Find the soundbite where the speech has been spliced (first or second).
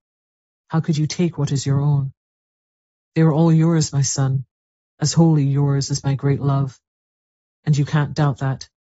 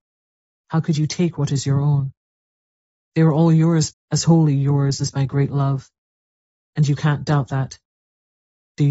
second